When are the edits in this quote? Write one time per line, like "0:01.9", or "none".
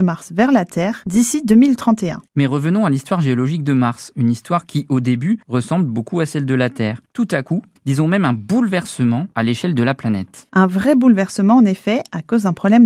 0:07.8